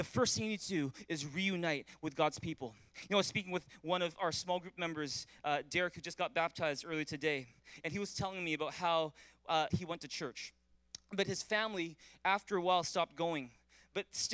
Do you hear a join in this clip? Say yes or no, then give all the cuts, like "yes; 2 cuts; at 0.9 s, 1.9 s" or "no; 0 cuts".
yes; 1 cut; at 9.7 s